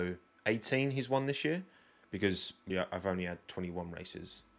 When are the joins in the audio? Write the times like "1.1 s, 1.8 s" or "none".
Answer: 2.7 s

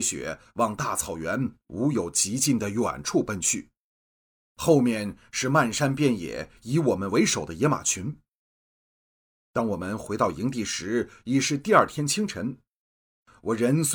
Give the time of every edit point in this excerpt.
none

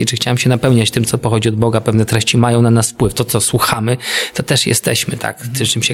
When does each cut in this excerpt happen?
none

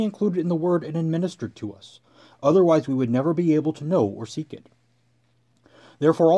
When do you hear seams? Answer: none

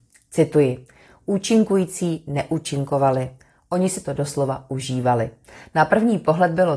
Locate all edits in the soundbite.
none

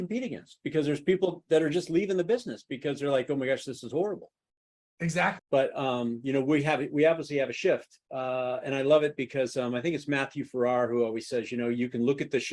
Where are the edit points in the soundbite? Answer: 5.4 s

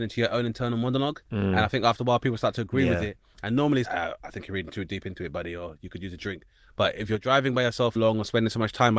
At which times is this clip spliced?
3.8 s, 8.0 s

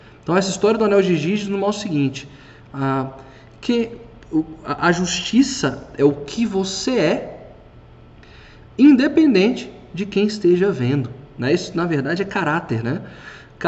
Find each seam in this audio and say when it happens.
none

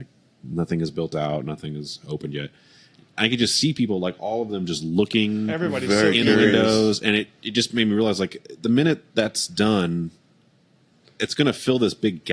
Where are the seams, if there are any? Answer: none

